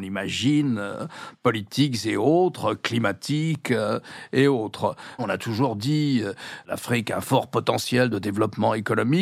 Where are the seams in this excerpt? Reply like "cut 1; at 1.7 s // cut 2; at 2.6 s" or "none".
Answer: cut 1; at 5.2 s